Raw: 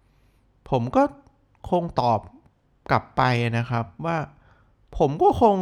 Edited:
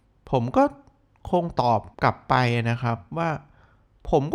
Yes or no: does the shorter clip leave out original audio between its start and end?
yes